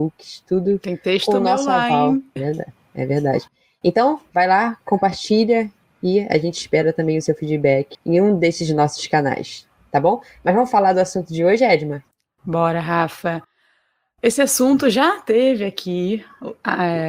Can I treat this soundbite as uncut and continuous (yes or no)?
no